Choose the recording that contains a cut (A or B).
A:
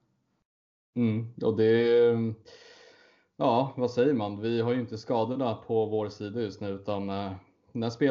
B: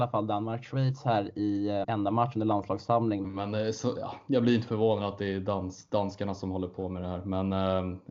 B